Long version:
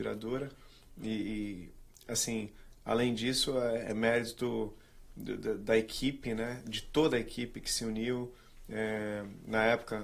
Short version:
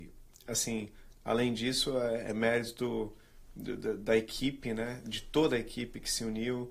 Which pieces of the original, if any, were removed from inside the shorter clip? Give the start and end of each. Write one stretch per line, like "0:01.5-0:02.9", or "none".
none